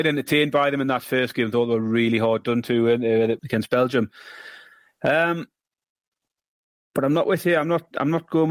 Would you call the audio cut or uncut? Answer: cut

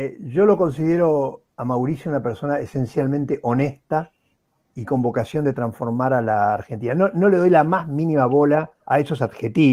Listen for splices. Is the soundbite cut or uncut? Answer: cut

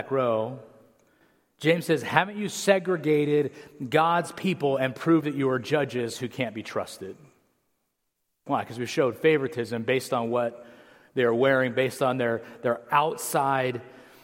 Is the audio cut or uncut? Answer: uncut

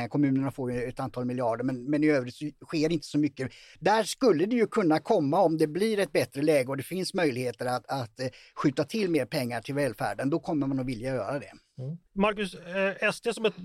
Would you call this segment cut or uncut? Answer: cut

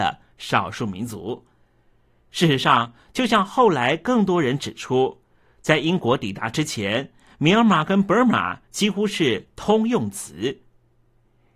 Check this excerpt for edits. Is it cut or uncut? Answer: uncut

